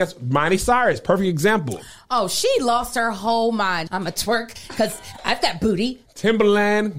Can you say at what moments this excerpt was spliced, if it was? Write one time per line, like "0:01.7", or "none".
0:03.9
0:06.1